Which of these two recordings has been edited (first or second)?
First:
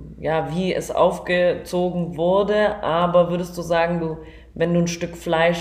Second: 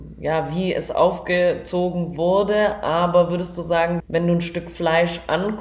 second